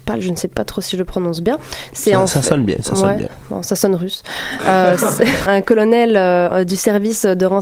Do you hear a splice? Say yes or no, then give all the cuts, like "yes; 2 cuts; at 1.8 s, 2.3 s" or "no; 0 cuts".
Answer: yes; 1 cut; at 5.4 s